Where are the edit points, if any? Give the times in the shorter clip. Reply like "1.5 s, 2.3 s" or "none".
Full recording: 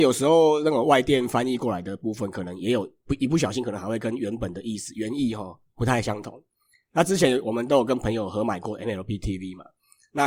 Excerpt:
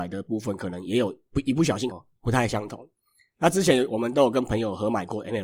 1.9 s